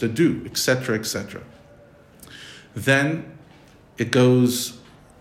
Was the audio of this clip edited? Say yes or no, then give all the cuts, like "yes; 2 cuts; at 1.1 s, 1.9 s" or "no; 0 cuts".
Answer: no; 0 cuts